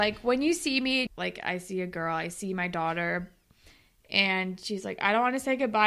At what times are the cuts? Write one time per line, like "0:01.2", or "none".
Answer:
0:01.1